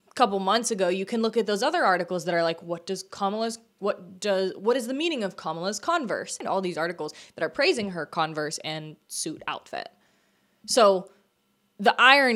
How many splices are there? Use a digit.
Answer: 0